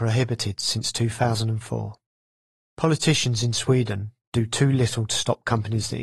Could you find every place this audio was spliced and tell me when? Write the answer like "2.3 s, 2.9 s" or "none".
2.6 s